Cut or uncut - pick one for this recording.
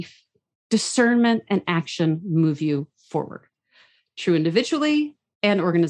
uncut